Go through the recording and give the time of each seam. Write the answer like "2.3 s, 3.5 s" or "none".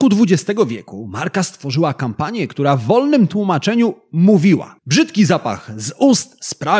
none